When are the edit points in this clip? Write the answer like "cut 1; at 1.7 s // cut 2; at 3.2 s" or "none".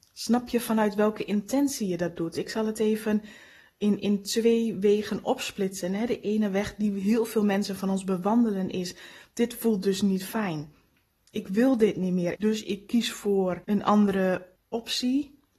cut 1; at 12.4 s // cut 2; at 13.6 s